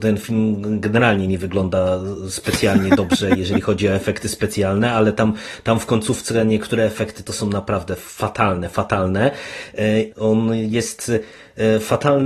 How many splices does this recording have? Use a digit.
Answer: 1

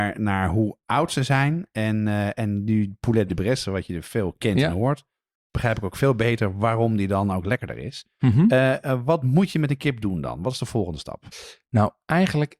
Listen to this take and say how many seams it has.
0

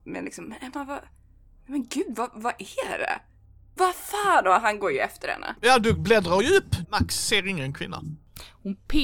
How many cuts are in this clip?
2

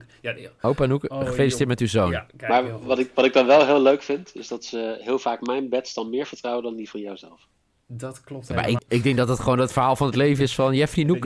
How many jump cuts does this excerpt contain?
1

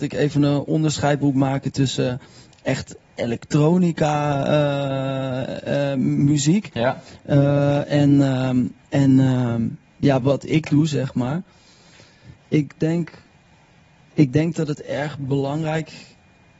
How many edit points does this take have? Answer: 1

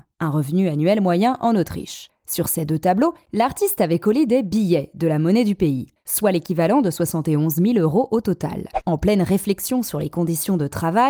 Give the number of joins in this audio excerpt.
2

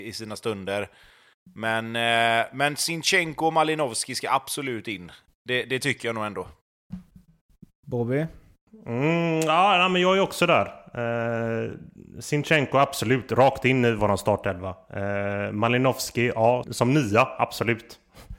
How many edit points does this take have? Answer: 1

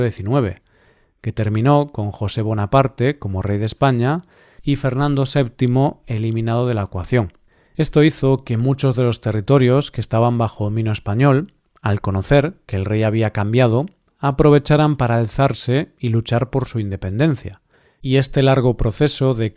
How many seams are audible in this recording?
0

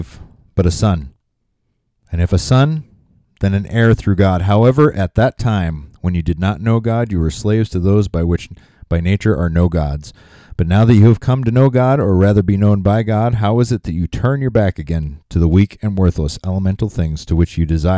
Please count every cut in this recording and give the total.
0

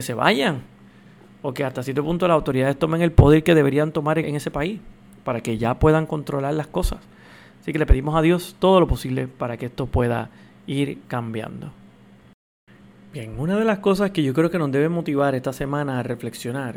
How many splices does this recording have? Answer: 1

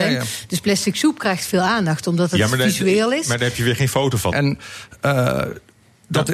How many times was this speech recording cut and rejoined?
1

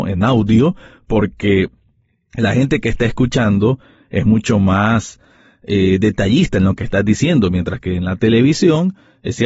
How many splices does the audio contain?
0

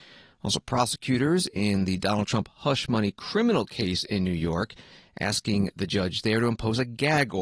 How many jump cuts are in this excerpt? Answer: 0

